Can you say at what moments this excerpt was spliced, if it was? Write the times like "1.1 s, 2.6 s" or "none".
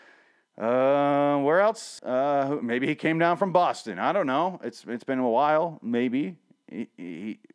2.0 s